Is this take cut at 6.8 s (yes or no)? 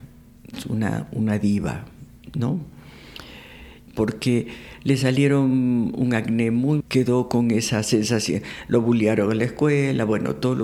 yes